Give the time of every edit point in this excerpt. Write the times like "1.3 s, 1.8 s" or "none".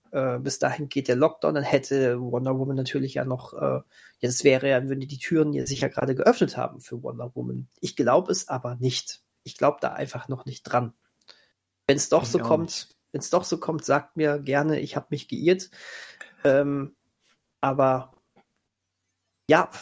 none

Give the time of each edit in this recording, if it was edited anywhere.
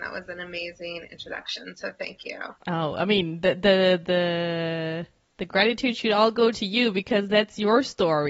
2.6 s

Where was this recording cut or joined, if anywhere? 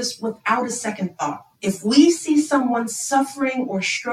1.5 s

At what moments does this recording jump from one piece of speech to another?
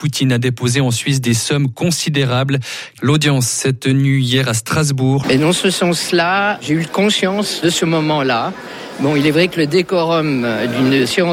3.0 s, 5.2 s

